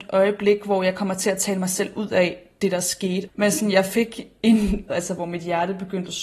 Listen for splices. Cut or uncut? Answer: cut